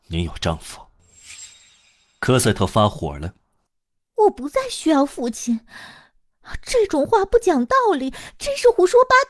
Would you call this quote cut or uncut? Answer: uncut